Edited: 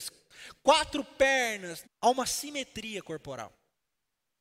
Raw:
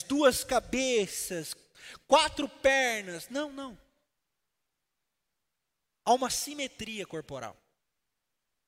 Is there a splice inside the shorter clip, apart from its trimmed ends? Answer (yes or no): yes